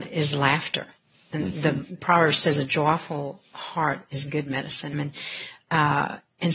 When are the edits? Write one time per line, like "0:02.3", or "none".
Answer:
0:04.9

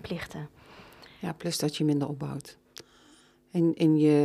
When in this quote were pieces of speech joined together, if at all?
none

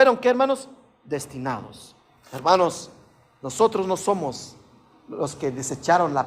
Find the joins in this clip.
none

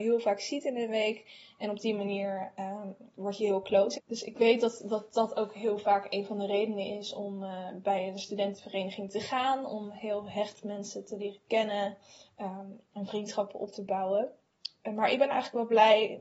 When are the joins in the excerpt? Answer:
0:03.9

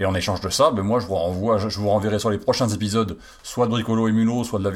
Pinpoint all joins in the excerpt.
none

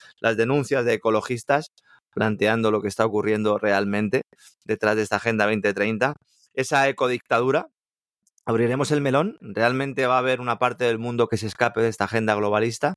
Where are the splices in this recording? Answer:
0:09.4

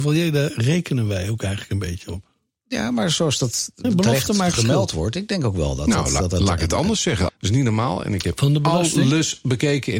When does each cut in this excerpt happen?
0:03.8
0:07.3

